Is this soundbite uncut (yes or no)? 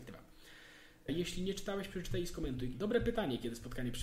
no